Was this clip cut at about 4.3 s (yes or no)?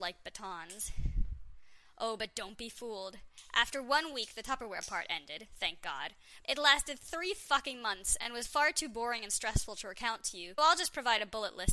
no